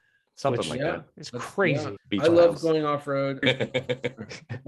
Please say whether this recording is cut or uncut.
cut